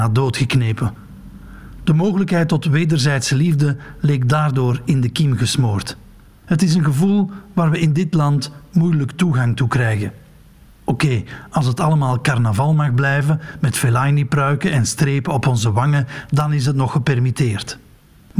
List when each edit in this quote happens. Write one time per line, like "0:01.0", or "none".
0:06.4